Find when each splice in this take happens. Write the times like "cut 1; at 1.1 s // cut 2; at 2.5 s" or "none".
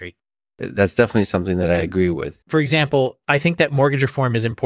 cut 1; at 2.4 s